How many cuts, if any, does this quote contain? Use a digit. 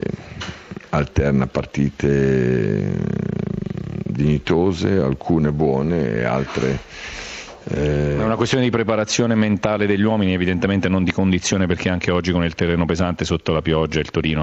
0